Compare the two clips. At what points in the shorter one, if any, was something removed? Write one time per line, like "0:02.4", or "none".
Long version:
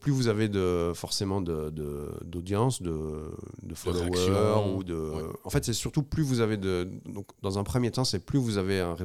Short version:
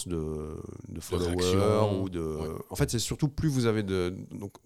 none